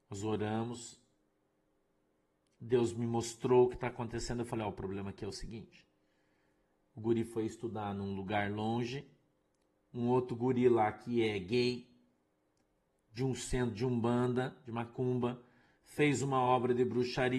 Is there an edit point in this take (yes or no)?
no